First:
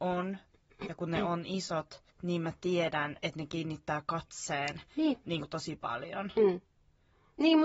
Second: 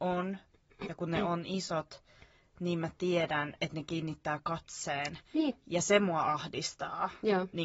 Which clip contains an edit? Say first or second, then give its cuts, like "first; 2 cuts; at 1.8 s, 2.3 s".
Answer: first; 2 cuts; at 2.1 s, 5.2 s